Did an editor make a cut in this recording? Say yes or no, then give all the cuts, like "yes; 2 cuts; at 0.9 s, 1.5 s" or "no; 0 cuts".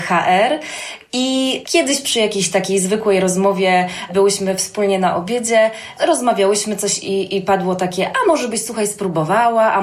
no; 0 cuts